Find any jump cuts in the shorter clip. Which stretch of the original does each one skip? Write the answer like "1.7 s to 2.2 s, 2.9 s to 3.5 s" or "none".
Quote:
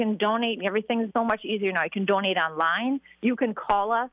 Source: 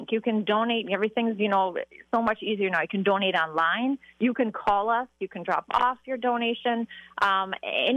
1.4 s to 2.1 s